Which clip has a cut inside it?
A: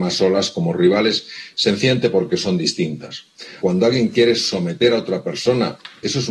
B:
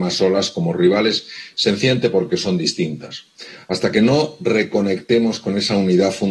A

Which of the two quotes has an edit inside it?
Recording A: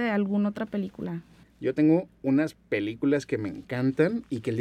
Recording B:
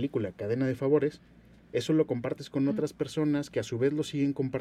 A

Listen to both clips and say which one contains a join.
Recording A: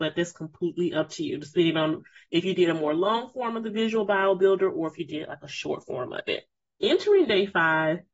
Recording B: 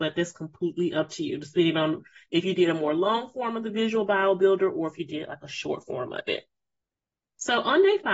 A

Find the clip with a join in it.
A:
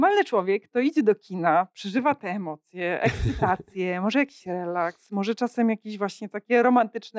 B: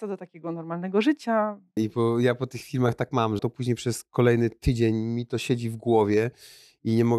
B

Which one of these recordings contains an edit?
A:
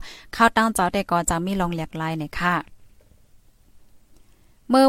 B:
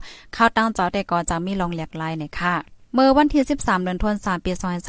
B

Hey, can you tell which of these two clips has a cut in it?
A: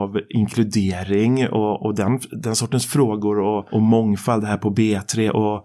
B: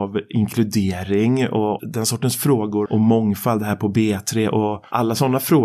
B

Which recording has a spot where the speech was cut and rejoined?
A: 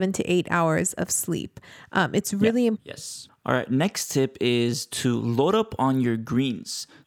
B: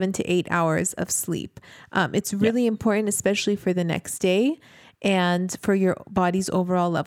A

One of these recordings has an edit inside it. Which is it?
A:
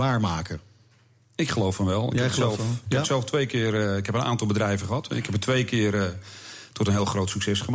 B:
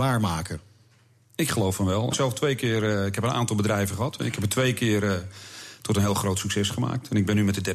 B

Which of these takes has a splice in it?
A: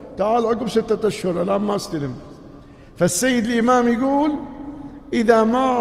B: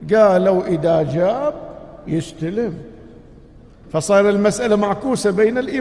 B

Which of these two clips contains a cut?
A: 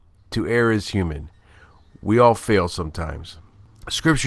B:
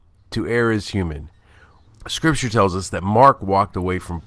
B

